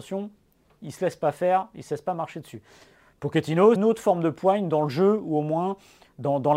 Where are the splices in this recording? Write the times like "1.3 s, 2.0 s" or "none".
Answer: 3.8 s

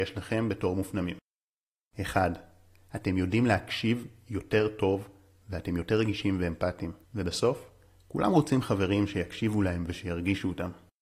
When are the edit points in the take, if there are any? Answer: 7.0 s

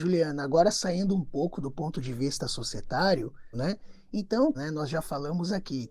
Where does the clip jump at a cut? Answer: 3.5 s, 4.5 s

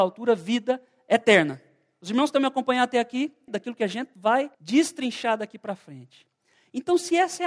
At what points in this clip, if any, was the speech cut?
3.5 s, 4.5 s

